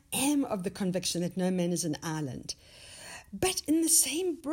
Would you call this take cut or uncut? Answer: uncut